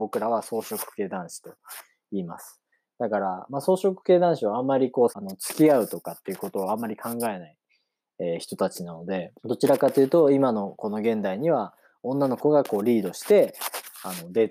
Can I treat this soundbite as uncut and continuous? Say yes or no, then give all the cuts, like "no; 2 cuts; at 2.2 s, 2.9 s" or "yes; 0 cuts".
no; 2 cuts; at 5.1 s, 9.4 s